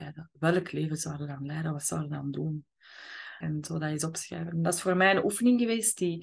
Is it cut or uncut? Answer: cut